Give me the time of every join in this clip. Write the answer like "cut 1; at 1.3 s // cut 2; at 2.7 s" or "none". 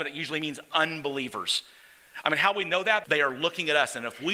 cut 1; at 3.0 s